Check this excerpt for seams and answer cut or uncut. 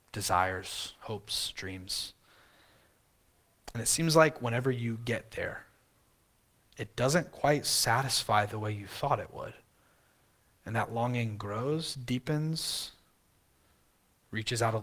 uncut